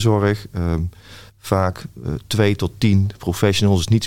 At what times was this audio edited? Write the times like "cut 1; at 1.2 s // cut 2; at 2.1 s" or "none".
cut 1; at 1.3 s